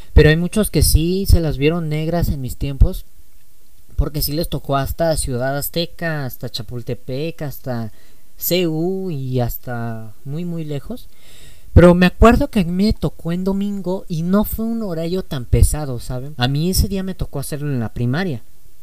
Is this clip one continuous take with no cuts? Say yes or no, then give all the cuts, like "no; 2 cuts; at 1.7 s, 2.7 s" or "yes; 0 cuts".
no; 1 cut; at 16.4 s